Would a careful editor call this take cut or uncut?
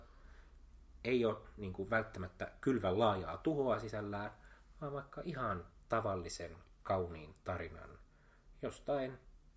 uncut